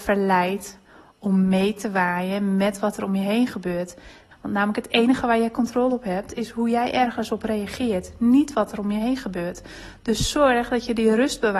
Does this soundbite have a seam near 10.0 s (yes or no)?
no